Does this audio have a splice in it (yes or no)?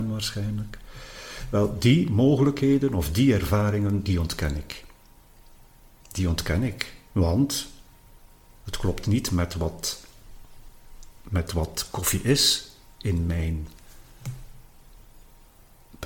no